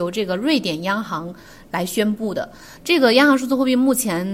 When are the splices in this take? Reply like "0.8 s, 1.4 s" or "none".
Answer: 2.8 s